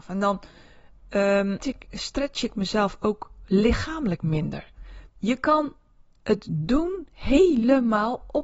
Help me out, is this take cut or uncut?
cut